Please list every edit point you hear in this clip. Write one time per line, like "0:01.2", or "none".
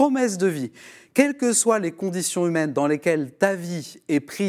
none

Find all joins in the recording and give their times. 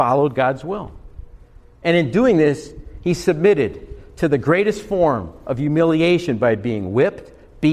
none

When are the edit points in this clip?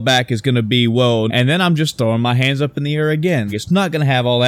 0:01.3
0:03.5

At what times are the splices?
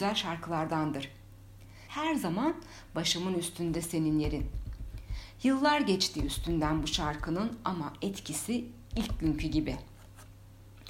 0:01.9

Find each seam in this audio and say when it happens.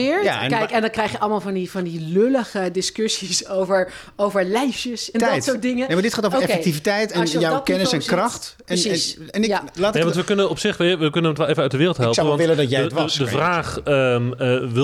0:05.1

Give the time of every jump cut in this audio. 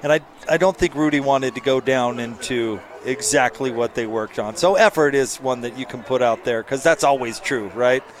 none

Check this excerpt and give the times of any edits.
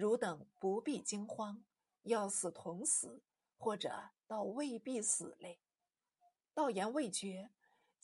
none

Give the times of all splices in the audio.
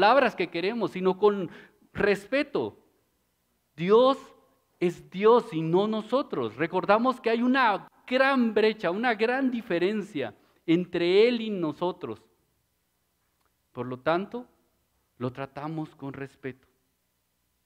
none

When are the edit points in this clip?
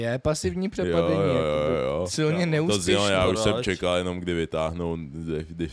none

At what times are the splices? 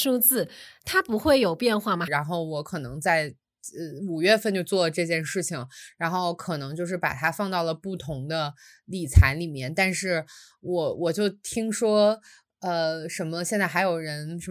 0:02.1

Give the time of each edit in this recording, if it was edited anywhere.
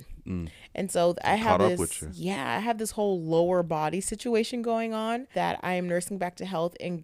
0:05.3

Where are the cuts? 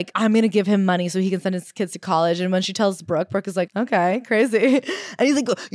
0:03.7

